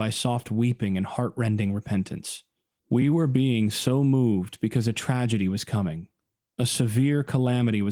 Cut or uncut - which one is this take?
cut